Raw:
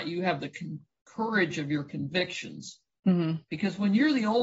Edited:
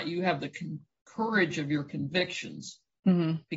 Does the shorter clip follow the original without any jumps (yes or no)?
yes